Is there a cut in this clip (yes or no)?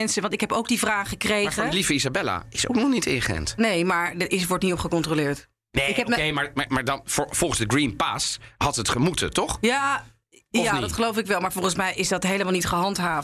no